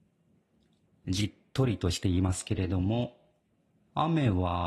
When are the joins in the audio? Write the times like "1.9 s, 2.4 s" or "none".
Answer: none